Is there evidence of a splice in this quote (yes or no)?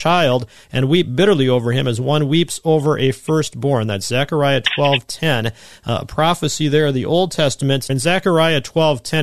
yes